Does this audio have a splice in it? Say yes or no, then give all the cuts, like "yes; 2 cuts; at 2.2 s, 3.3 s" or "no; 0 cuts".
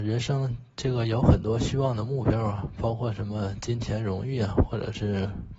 no; 0 cuts